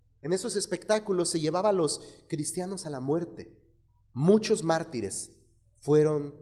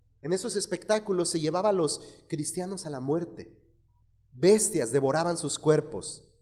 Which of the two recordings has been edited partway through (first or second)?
first